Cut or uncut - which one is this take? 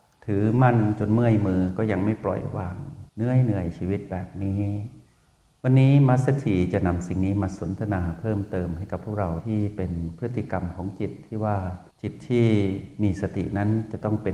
cut